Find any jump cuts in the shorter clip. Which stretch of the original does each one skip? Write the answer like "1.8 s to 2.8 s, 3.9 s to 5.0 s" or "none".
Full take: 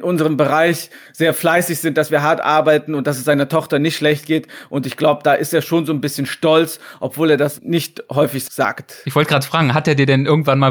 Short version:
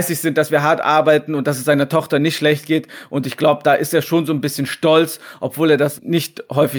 none